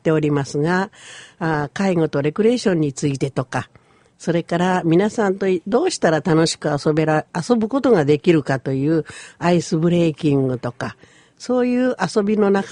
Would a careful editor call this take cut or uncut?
uncut